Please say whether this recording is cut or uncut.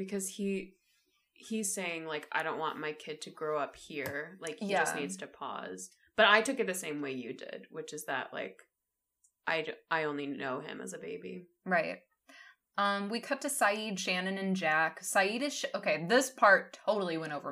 uncut